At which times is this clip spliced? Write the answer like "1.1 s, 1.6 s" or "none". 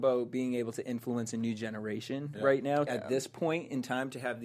2.9 s